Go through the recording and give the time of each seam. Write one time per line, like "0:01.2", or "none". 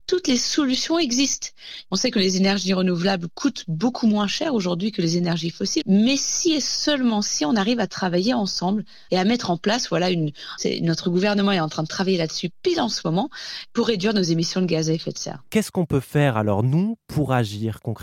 0:05.8
0:10.6

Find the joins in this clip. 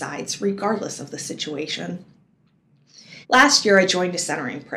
0:03.2

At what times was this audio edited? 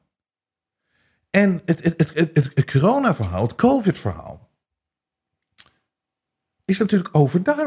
none

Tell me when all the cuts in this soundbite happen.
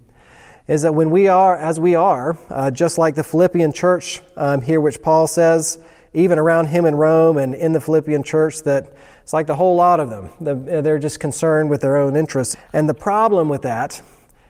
0:12.5

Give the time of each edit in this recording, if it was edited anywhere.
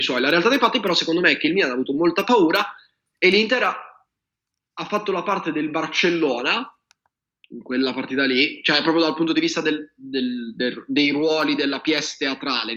none

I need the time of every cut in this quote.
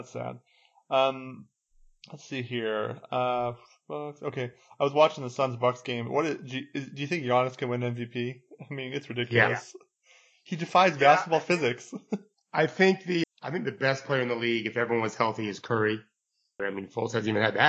0:13.2
0:16.6

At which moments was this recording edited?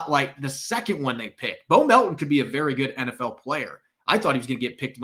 none

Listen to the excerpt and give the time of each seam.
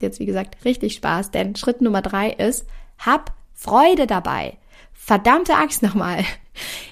none

